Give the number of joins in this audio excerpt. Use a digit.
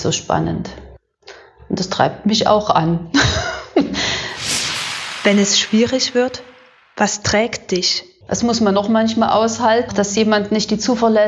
2